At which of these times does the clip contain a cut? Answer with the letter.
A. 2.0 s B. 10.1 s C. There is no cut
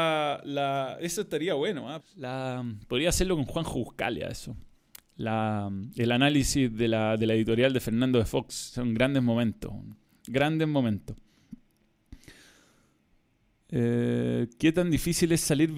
A